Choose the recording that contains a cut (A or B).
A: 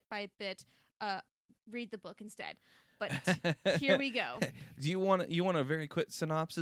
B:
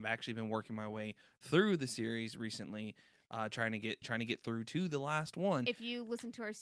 B